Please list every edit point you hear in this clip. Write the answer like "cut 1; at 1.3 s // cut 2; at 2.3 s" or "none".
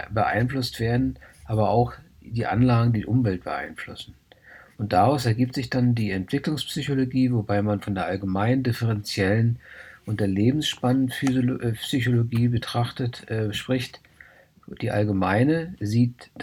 none